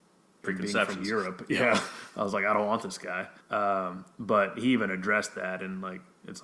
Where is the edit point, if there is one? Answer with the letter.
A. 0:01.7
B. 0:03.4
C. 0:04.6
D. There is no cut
B